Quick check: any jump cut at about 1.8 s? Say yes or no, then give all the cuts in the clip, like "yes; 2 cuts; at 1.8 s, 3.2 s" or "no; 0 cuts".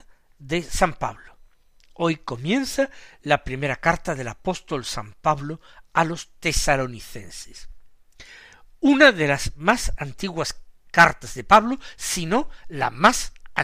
no; 0 cuts